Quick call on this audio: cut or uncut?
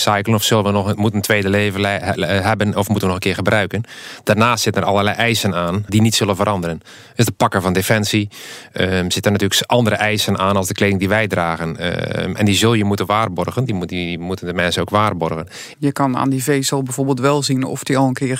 cut